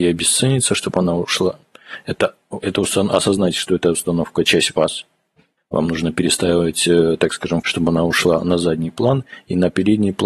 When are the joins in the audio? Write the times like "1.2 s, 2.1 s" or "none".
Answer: 5.6 s, 7.6 s